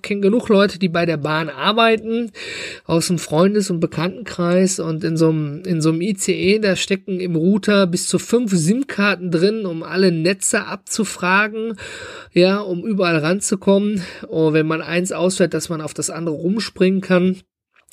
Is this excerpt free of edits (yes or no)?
yes